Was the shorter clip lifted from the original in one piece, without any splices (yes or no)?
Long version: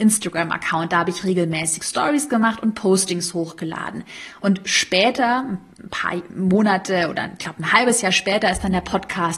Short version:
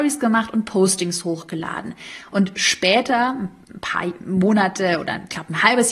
yes